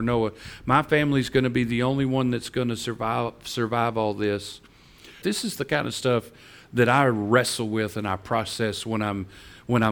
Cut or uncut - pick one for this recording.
cut